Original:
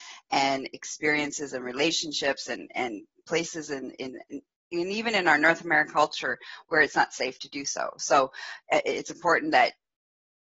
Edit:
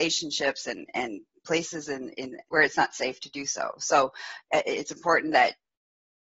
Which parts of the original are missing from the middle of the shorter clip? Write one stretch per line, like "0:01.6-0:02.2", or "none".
0:04.3-0:06.6